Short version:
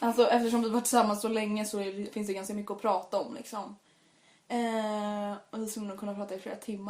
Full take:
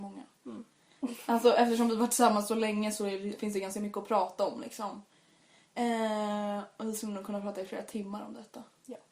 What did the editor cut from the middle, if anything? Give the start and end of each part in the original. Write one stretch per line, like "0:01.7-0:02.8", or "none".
none